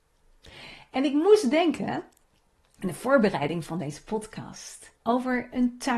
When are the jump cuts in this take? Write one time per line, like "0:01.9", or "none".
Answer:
0:05.0